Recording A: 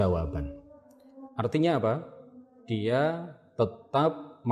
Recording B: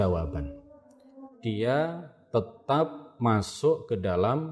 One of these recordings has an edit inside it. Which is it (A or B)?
B